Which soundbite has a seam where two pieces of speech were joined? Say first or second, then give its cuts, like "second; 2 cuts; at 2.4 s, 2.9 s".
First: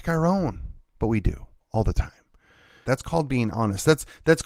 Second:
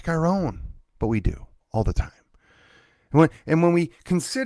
first; 1 cut; at 2.8 s